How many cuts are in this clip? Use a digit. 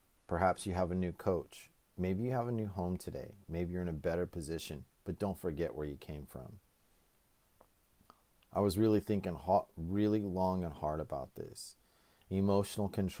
0